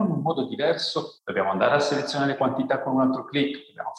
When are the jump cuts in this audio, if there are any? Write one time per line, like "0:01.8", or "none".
0:01.2